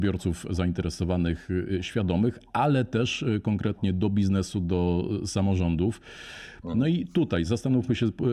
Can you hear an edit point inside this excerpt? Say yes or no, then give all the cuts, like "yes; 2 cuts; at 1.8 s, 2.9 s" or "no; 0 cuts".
no; 0 cuts